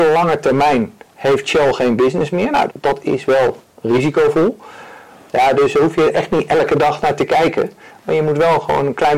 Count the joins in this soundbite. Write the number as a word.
two